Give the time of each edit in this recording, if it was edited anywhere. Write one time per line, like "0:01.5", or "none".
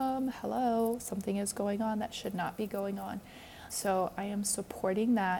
0:03.7

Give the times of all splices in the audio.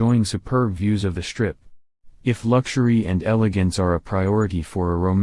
0:02.2

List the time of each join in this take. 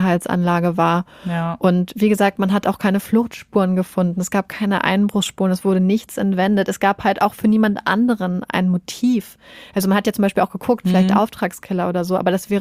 none

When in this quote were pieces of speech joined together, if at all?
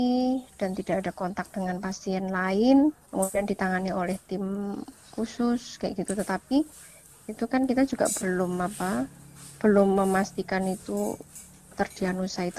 0:08.2

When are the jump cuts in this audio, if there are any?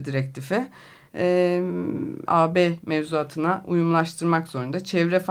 0:01.1
0:02.3

